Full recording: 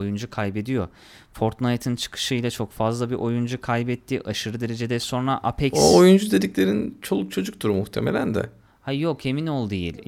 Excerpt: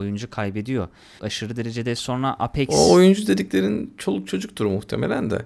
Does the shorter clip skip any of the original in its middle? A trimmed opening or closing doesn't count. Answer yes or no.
yes